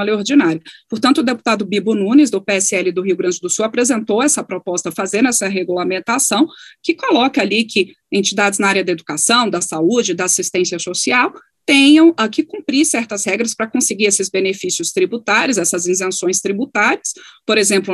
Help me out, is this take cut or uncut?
cut